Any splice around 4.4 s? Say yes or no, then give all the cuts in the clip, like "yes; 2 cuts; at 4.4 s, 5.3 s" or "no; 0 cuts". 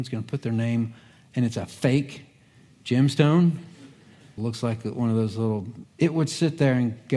yes; 2 cuts; at 4.4 s, 5.8 s